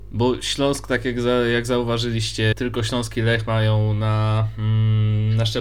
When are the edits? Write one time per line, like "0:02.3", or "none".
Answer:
0:02.5